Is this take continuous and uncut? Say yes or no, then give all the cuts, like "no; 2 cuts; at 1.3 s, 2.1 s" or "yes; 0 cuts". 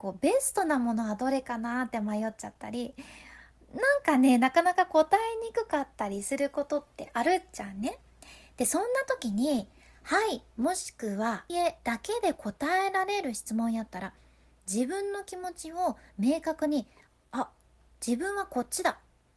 no; 1 cut; at 11.5 s